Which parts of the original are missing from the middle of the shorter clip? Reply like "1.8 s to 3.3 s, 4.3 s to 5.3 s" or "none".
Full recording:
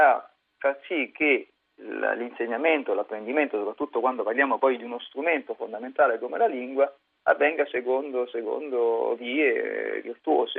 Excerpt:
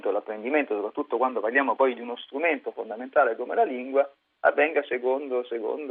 none